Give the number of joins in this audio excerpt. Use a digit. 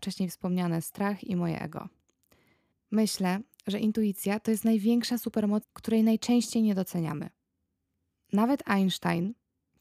2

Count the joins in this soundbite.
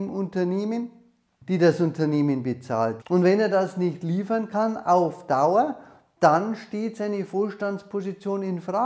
2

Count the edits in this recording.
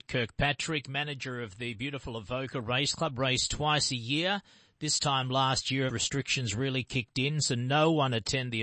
1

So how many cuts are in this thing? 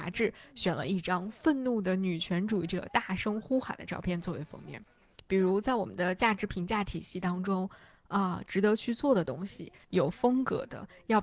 3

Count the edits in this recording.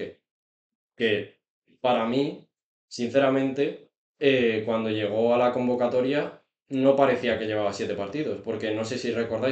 0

